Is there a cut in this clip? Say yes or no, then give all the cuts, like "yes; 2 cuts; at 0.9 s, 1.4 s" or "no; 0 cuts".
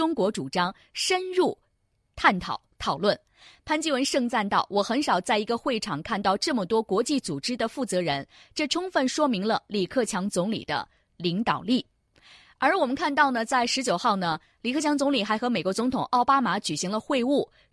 no; 0 cuts